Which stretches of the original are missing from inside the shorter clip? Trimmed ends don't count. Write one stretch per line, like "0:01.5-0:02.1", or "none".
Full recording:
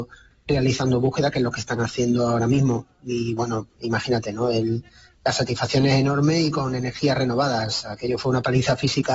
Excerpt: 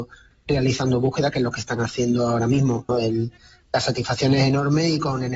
0:02.9-0:04.4